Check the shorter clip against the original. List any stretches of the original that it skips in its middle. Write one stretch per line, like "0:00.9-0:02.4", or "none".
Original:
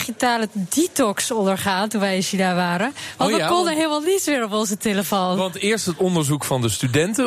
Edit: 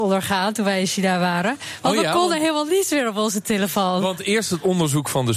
none